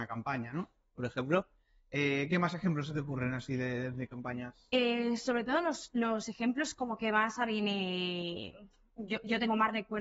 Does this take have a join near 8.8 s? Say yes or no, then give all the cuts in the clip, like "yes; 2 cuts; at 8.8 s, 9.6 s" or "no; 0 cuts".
no; 0 cuts